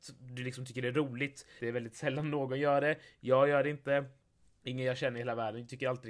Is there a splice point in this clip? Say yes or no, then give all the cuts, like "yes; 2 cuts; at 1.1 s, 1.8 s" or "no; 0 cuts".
yes; 1 cut; at 1.6 s